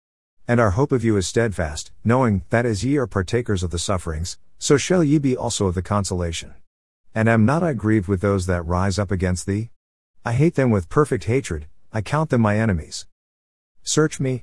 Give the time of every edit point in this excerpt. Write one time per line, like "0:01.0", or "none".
0:07.0